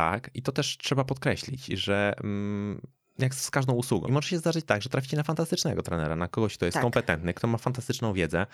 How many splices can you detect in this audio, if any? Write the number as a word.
one